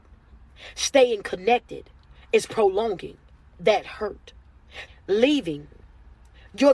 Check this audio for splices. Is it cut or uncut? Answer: cut